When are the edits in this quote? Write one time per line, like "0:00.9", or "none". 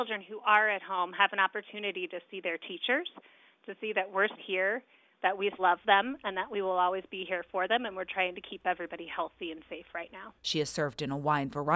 0:04.4
0:05.6
0:10.4